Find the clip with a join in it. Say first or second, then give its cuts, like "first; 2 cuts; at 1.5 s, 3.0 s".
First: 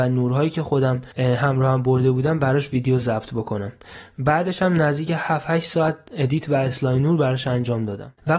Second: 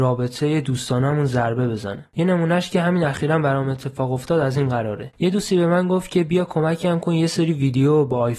first; 1 cut; at 1.1 s